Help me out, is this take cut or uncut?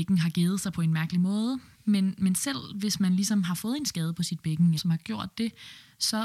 cut